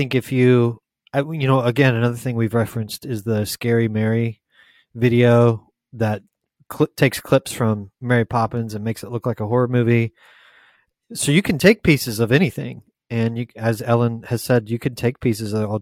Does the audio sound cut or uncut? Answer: uncut